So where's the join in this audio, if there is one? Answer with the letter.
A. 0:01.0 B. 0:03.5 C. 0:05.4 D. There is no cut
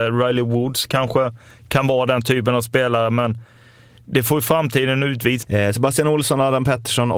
C